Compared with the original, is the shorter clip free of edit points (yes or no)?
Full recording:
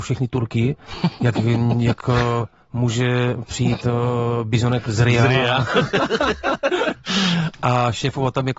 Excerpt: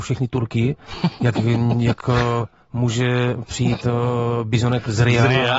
yes